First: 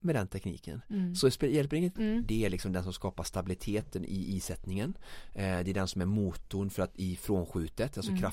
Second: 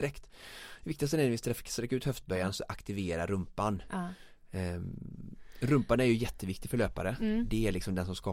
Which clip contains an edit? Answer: first; 1 cut; at 2.0 s

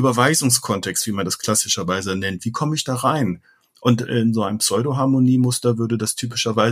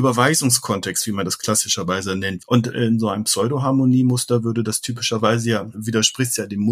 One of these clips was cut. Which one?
second; 2 cuts; at 2.4 s, 5.7 s

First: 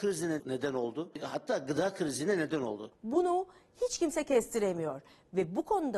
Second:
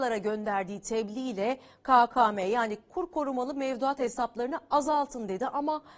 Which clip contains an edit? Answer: first; 1 cut; at 2.9 s

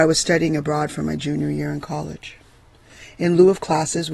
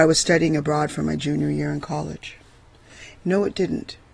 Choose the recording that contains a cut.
second; 1 cut; at 3.1 s

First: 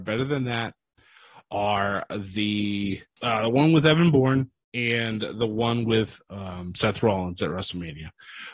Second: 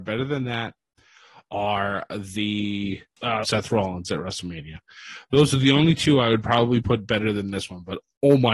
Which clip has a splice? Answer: second; 1 cut; at 3.4 s

